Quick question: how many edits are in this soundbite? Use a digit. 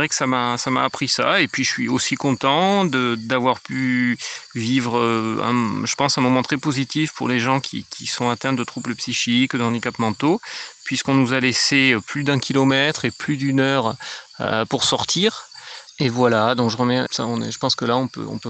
2